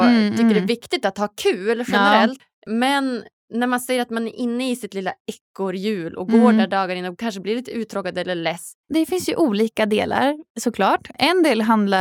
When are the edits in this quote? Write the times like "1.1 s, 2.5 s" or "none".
8.8 s